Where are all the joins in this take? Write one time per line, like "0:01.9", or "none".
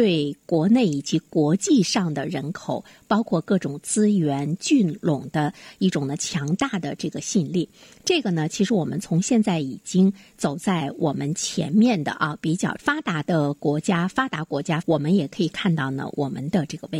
0:14.8